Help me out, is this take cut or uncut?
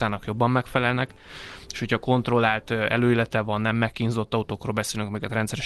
uncut